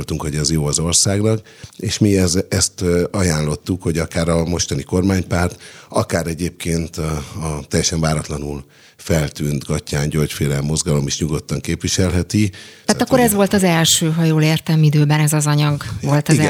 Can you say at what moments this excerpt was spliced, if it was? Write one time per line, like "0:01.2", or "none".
0:12.8